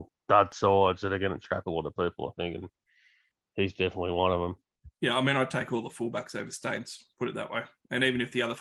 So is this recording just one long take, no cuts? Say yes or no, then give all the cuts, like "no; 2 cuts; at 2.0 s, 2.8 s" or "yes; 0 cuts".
yes; 0 cuts